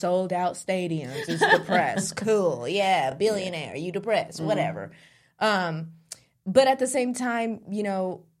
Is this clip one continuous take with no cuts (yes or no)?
yes